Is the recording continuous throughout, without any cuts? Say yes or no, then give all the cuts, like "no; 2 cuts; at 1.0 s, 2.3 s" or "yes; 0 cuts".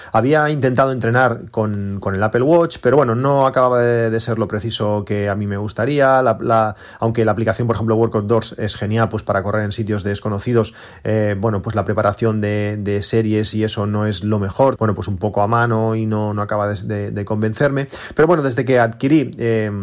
no; 1 cut; at 14.8 s